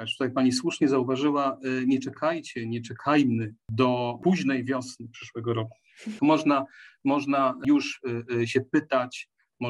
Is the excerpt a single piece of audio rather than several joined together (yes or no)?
no